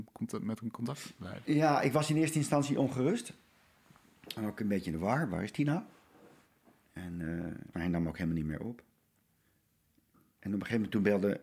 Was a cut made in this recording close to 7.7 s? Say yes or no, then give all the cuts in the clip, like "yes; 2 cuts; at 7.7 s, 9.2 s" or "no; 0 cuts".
yes; 1 cut; at 7.7 s